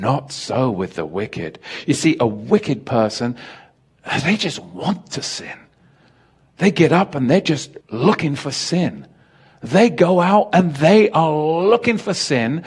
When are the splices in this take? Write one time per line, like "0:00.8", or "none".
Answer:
0:07.8